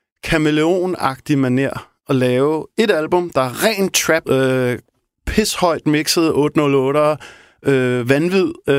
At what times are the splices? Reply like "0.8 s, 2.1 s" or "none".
4.2 s